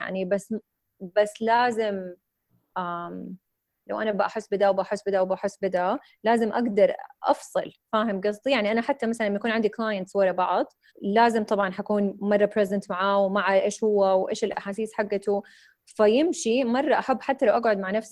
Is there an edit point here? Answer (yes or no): yes